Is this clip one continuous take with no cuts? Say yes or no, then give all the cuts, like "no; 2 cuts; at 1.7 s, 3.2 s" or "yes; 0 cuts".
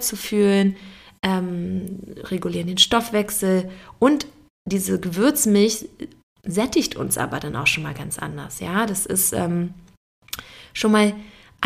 yes; 0 cuts